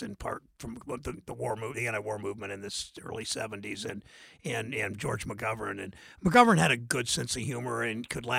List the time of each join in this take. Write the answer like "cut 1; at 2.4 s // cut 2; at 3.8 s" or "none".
none